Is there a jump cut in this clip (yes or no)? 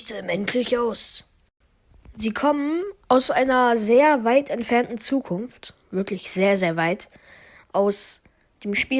no